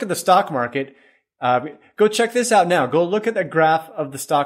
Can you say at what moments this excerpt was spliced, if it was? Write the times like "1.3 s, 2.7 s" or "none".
none